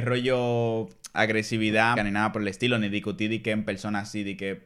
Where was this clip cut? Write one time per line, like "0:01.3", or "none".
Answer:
0:02.0